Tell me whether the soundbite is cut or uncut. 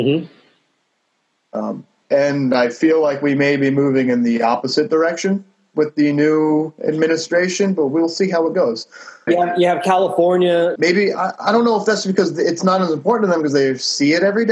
cut